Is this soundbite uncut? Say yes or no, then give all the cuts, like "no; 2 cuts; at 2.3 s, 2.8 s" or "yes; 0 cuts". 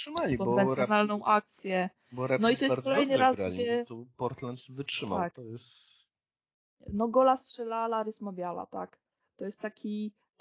yes; 0 cuts